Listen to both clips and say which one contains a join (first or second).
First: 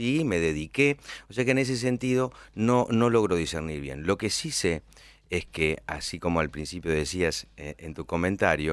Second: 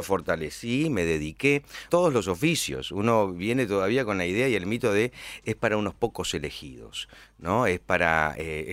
second